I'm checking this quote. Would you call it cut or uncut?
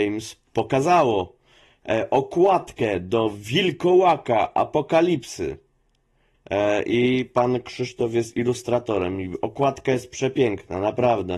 cut